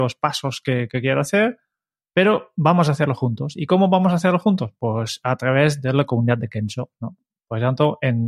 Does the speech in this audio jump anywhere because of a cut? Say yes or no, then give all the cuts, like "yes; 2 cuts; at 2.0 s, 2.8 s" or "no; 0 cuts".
no; 0 cuts